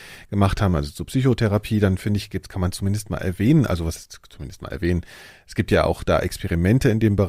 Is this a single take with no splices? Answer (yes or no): yes